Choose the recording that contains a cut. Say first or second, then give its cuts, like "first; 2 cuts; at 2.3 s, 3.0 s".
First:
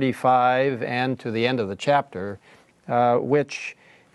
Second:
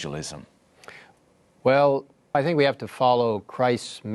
second; 1 cut; at 2.3 s